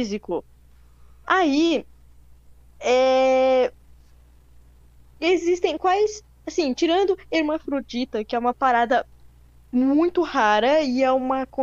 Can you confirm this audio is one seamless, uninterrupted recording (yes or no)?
no